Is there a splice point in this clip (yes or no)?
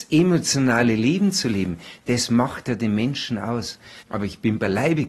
yes